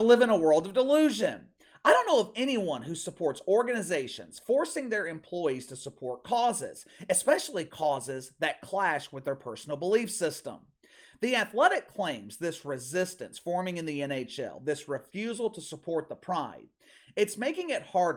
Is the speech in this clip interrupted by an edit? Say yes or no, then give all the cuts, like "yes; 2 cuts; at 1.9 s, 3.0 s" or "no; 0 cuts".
no; 0 cuts